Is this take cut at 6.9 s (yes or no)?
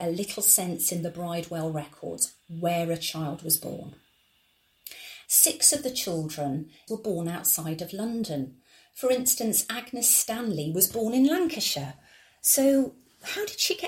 yes